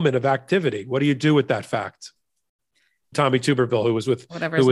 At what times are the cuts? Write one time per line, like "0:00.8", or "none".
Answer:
0:03.1